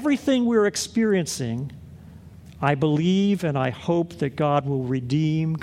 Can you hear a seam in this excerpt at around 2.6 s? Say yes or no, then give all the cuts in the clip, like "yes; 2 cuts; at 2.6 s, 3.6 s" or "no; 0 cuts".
no; 0 cuts